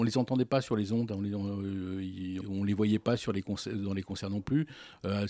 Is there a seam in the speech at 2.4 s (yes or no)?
yes